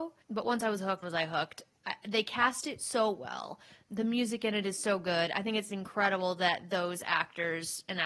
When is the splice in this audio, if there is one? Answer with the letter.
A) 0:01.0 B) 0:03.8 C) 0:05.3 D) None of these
A